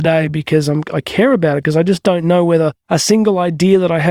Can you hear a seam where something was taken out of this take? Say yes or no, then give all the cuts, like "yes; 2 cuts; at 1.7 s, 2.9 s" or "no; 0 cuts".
yes; 1 cut; at 2.8 s